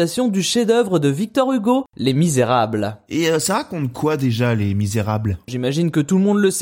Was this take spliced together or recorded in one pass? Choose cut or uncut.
cut